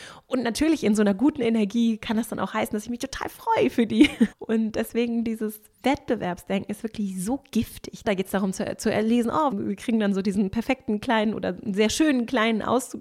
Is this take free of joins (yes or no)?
no